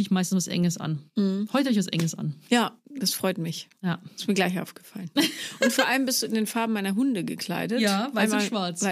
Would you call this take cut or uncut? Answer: uncut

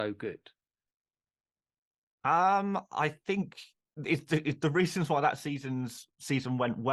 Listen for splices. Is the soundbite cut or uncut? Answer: cut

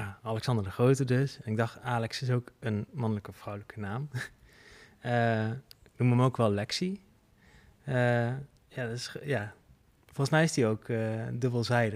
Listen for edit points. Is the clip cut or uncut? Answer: uncut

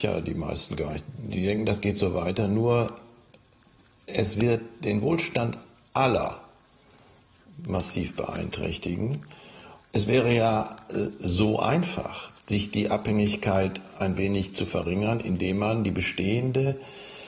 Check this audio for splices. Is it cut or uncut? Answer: uncut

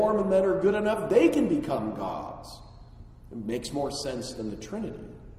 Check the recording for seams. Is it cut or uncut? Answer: uncut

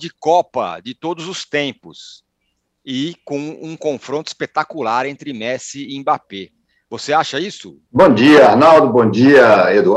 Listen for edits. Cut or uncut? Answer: cut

